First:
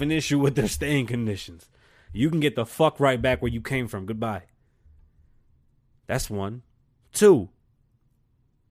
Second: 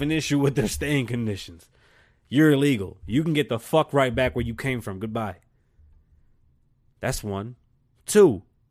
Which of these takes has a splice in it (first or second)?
first